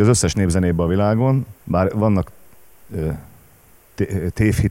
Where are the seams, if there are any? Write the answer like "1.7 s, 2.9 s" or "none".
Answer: 1.6 s